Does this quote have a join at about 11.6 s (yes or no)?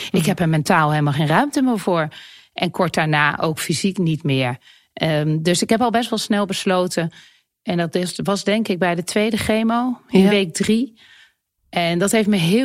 yes